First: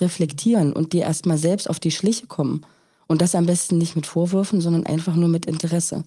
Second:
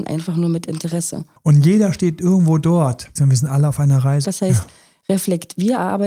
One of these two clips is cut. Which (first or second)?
second